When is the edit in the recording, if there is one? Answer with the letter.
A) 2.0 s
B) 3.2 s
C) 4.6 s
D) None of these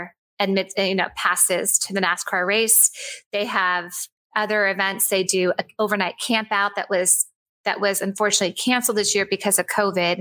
D